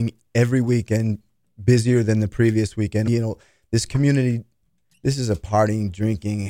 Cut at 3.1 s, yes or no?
yes